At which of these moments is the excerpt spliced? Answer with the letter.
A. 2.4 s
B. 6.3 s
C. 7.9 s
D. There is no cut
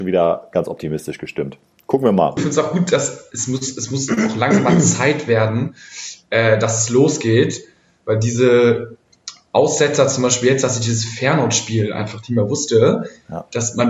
A